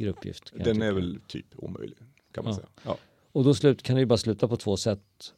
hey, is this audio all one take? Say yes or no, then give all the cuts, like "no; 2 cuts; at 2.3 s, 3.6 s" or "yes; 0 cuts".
yes; 0 cuts